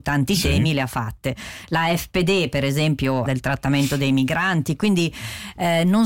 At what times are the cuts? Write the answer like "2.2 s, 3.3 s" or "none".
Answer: 3.3 s